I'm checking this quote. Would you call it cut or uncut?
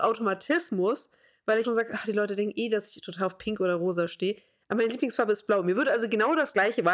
cut